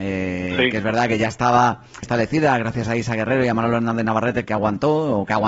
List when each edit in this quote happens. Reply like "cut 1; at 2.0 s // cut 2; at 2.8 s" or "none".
cut 1; at 2.0 s // cut 2; at 4.4 s